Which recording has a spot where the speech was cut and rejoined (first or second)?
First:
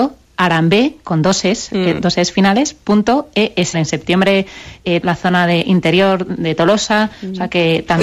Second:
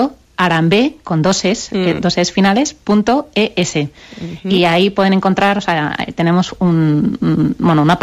first